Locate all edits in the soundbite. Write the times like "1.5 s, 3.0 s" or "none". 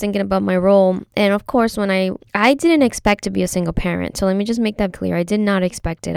2.2 s, 4.9 s